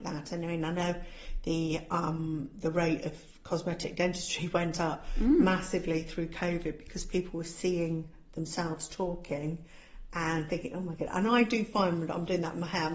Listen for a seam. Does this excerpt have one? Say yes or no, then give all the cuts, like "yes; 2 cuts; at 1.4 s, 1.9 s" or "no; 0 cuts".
no; 0 cuts